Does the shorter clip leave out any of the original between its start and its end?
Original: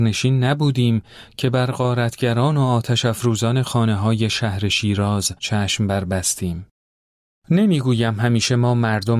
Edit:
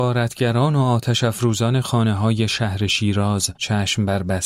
no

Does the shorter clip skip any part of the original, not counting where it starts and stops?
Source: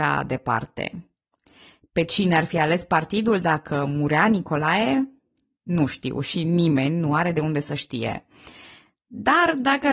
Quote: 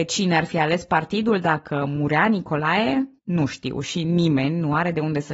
yes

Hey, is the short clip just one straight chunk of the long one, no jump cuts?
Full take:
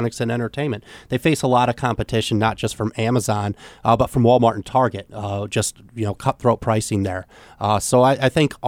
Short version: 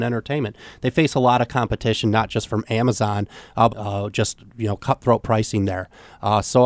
no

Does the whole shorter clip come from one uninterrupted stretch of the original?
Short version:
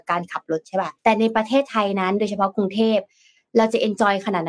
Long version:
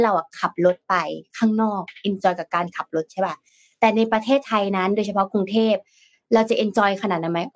no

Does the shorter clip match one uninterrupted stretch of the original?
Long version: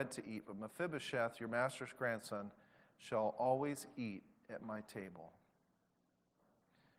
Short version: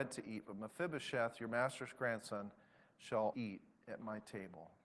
no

